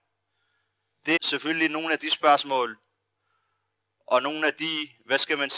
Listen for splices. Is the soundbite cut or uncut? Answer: cut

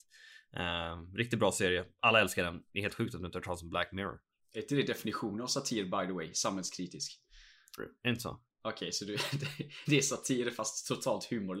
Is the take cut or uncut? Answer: cut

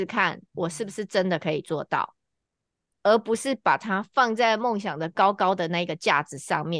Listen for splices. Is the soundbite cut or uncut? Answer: uncut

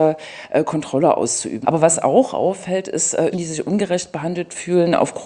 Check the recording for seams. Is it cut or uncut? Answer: cut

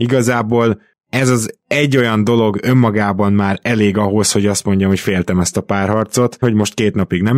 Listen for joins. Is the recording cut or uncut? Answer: cut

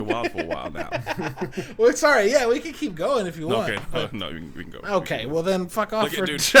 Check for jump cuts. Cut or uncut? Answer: uncut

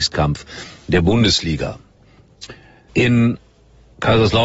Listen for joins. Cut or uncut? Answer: cut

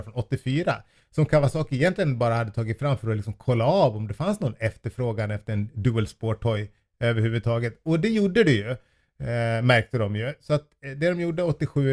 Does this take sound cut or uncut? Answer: uncut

